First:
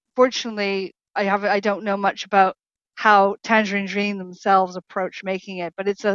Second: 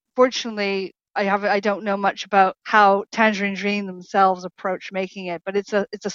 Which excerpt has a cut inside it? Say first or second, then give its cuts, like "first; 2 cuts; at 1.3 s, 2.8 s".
second; 1 cut; at 2.6 s